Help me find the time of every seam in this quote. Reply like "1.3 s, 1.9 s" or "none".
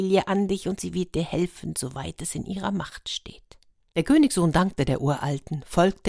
none